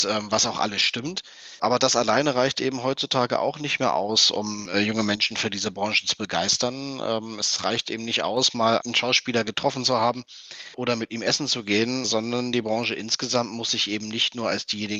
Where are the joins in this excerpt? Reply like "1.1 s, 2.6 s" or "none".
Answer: 8.8 s